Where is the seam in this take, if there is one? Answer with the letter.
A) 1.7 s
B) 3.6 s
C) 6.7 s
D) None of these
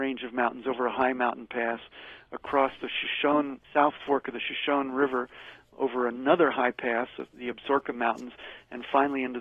B